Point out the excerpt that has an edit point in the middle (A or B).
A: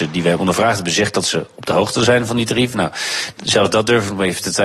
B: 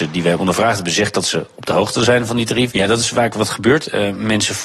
B